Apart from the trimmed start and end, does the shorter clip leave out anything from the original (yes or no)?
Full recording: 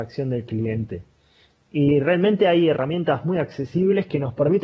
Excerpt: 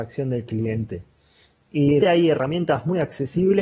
yes